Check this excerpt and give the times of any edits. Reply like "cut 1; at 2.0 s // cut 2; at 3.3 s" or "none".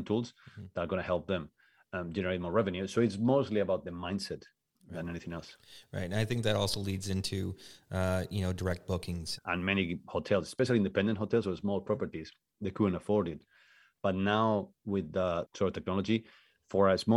cut 1; at 9.4 s // cut 2; at 15.4 s